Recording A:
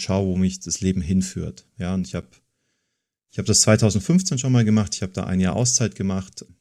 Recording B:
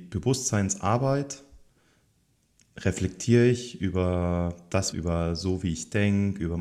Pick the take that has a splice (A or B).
B